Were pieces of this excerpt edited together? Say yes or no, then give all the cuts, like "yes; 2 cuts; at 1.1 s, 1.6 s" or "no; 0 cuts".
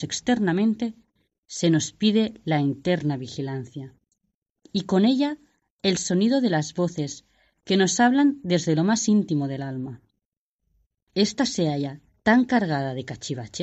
no; 0 cuts